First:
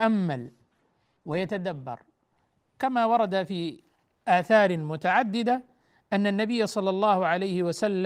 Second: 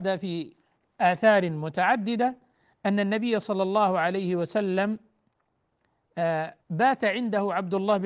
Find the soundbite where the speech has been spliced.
second; 1 cut; at 6.6 s

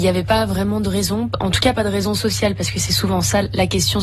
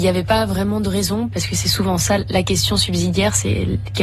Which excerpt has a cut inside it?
second; 1 cut; at 1.3 s

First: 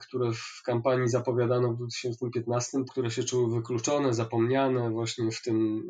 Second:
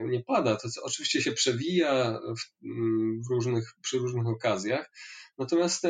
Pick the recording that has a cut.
first; 1 cut; at 2.9 s

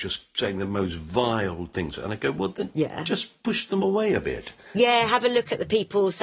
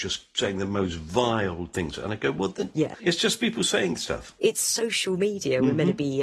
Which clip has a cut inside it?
second; 1 cut; at 2.9 s

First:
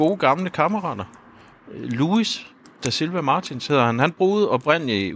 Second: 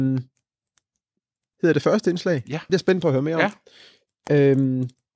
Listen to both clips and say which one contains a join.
second; 2 cuts; at 1.5 s, 2.7 s

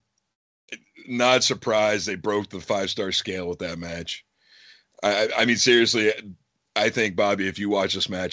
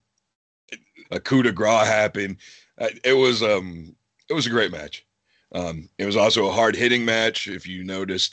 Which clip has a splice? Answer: second; 2 cuts; at 1.0 s, 5.4 s

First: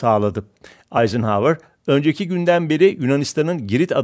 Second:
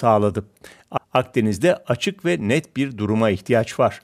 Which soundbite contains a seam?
second; 1 cut; at 1.0 s

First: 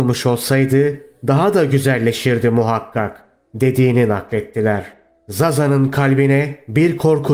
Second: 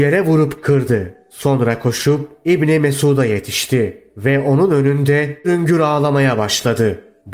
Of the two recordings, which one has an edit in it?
second; 1 cut; at 5.4 s

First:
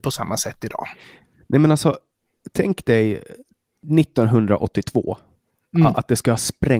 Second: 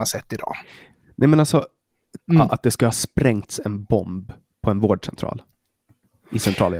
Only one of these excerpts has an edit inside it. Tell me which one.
second; 1 cut; at 2.2 s

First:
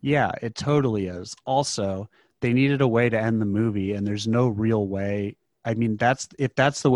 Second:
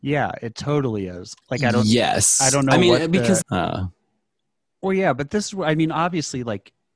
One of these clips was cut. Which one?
second; 2 cuts; at 1.4 s, 3.4 s

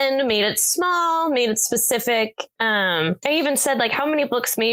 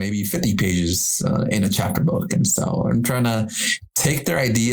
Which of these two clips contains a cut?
first; 1 cut; at 3.2 s

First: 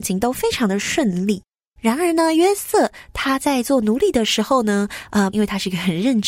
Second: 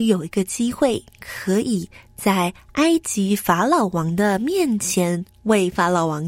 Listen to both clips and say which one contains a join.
first; 2 cuts; at 1.8 s, 5.3 s

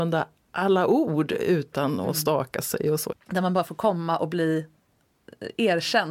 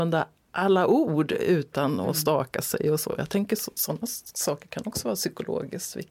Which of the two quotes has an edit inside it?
first; 1 cut; at 3.1 s

